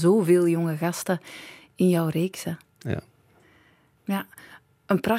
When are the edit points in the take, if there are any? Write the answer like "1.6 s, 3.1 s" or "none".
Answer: 4.0 s